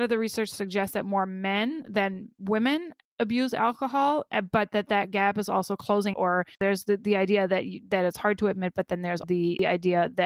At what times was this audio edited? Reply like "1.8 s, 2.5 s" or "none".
6.1 s, 9.2 s